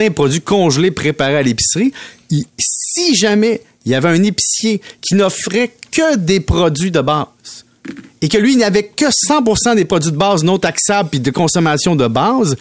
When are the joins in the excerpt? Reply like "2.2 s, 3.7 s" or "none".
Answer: none